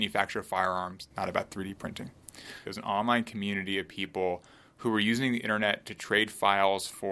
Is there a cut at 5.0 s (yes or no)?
no